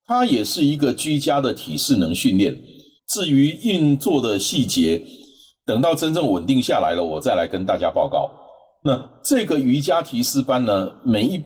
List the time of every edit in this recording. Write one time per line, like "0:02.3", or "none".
0:03.0